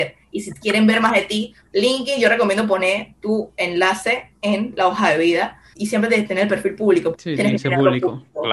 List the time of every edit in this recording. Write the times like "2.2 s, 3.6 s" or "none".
5.7 s, 7.1 s